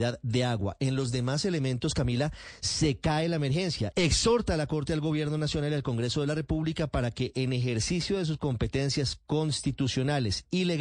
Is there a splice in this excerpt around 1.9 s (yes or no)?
no